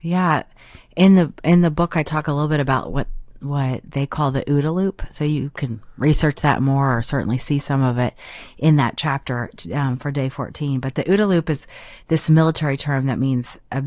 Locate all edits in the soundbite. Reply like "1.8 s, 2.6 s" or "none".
none